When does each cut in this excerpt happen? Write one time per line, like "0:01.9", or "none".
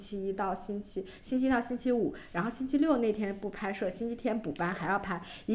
none